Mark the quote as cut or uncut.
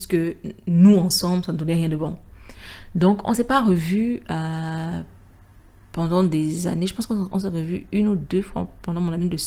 uncut